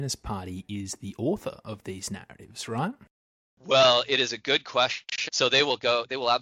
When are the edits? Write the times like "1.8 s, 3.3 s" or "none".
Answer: 5.3 s